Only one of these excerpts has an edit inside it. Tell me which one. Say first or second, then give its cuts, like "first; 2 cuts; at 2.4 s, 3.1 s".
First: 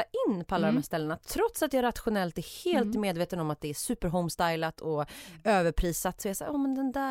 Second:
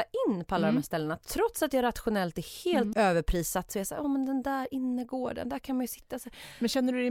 second; 1 cut; at 2.9 s